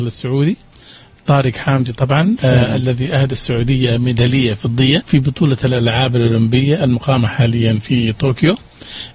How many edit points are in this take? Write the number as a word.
one